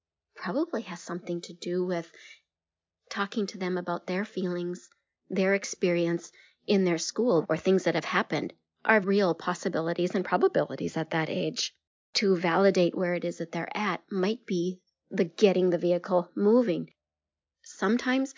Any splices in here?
yes; 2 cuts; at 7.4 s, 9.0 s

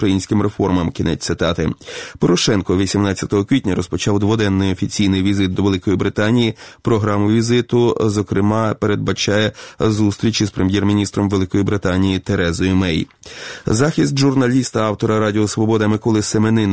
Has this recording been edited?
no; 0 cuts

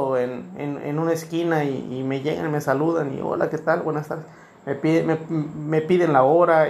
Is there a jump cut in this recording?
no; 0 cuts

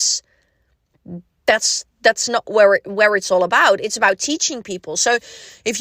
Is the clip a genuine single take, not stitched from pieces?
yes; 0 cuts

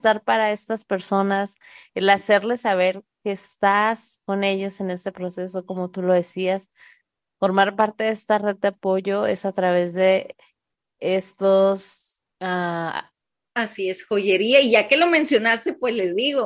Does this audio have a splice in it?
yes; 1 cut; at 12.3 s

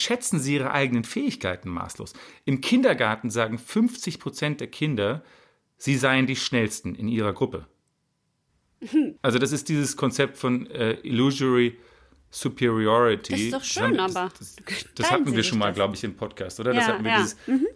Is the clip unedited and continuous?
no; 1 cut; at 9.2 s

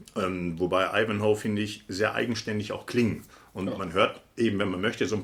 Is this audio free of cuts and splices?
yes; 0 cuts

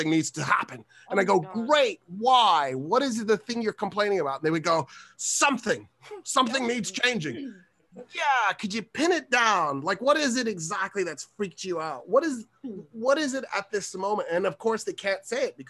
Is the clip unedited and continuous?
yes; 0 cuts

